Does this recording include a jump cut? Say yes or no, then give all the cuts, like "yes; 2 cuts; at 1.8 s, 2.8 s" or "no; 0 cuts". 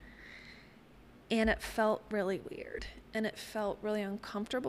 no; 0 cuts